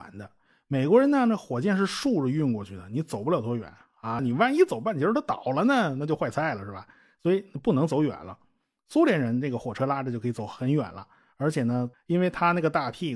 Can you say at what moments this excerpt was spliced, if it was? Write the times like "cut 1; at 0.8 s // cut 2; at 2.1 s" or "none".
cut 1; at 4.2 s // cut 2; at 11.9 s